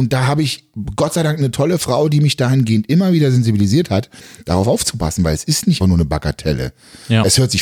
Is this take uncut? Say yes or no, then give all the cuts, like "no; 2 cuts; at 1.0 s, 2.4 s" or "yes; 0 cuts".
no; 1 cut; at 5.8 s